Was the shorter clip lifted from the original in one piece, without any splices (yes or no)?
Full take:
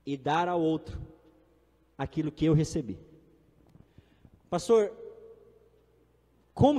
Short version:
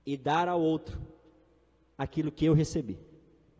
yes